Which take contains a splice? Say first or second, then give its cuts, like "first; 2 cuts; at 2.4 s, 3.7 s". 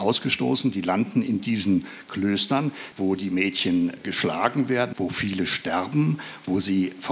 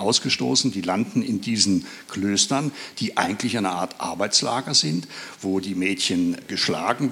first; 2 cuts; at 2.9 s, 4.9 s